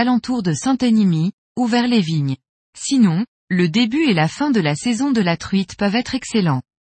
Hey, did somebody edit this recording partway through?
yes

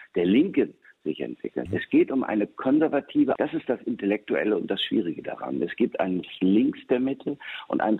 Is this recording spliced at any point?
yes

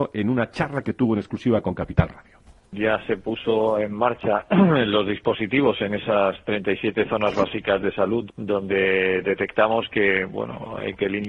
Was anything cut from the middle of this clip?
yes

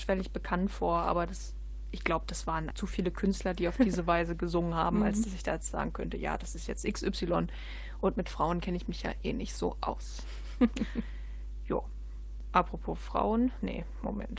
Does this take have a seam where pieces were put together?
yes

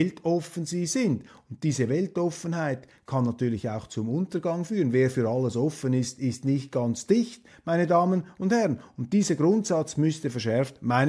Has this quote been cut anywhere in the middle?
no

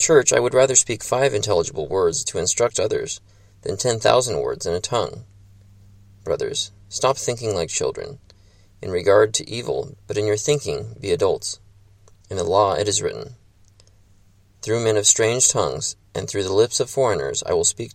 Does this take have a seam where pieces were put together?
yes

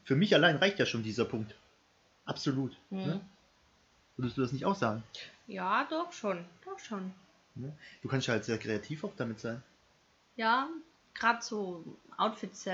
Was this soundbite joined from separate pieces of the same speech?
no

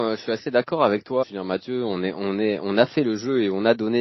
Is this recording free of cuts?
no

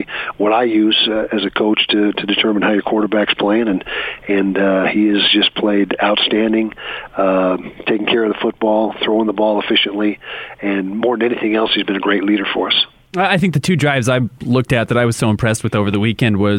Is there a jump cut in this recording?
no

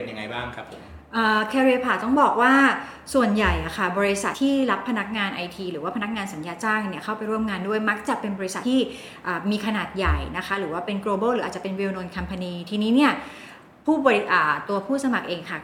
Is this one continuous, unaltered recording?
no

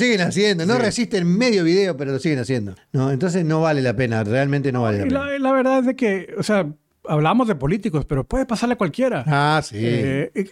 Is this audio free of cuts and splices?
no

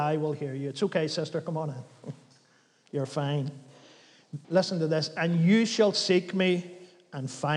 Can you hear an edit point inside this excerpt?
yes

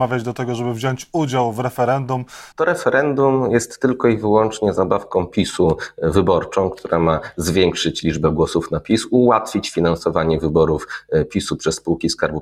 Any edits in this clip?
yes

